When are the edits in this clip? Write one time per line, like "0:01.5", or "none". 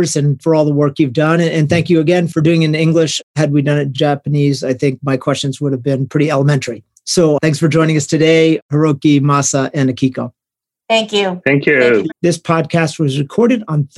0:12.1